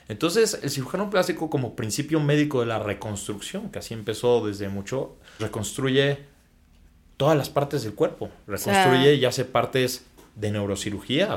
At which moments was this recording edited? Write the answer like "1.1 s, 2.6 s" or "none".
5.4 s